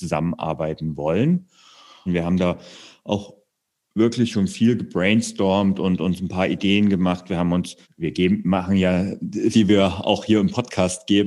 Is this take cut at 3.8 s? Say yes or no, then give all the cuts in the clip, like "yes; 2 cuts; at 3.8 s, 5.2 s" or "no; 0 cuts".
no; 3 cuts; at 2.1 s, 7.8 s, 9.5 s